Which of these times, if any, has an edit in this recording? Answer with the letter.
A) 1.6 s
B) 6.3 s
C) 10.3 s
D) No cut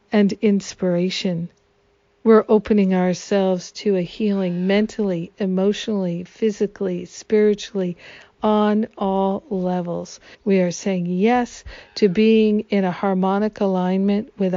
C